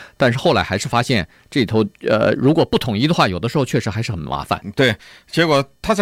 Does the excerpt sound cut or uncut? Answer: uncut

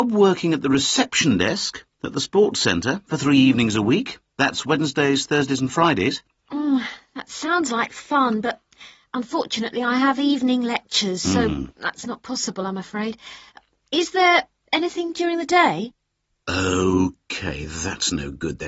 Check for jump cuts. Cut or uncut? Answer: uncut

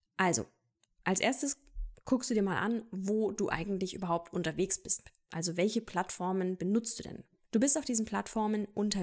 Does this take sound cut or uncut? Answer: cut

